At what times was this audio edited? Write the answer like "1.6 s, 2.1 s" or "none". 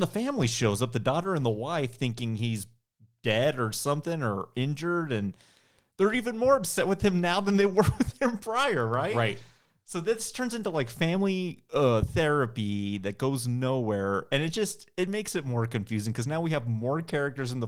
none